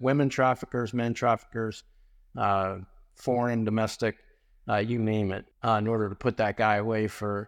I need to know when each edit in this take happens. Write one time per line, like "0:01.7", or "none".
0:05.5